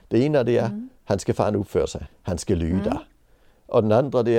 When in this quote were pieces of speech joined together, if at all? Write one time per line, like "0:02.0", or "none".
0:02.1